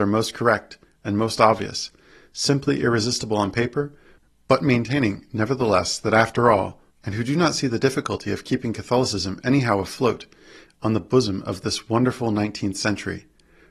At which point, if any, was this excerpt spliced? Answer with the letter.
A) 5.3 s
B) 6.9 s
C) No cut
B